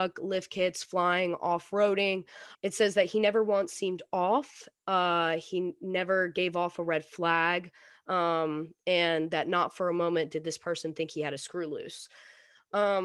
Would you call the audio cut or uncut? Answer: cut